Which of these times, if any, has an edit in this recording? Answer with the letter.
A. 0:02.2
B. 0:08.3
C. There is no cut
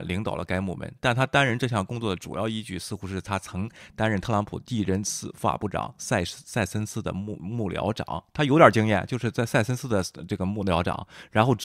C